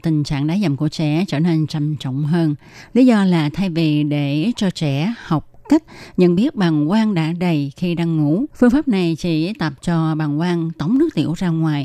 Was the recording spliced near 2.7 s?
no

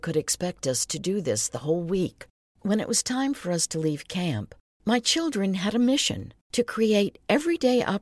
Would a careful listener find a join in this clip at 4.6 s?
no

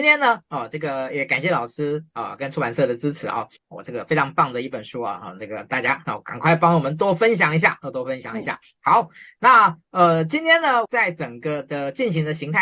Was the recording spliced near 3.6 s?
yes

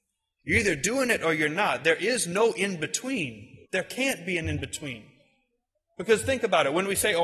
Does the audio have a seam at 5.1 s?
no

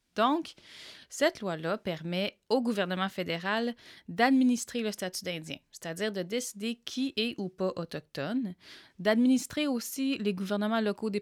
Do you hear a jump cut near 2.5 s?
yes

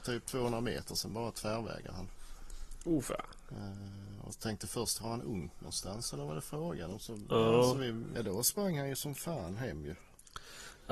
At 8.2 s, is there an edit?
yes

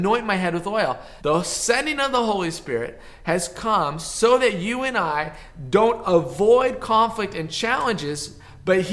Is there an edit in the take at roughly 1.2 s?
yes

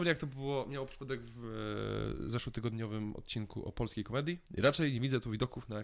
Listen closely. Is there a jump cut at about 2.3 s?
no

